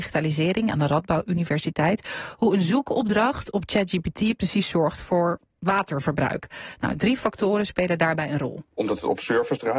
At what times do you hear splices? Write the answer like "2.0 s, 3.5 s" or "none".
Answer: 8.7 s